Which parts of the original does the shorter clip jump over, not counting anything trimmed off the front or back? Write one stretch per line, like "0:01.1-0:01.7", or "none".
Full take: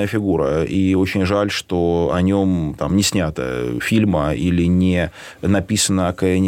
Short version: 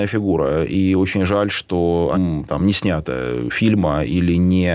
0:02.1-0:02.4